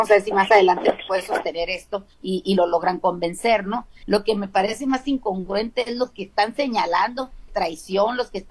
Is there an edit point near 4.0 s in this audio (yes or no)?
yes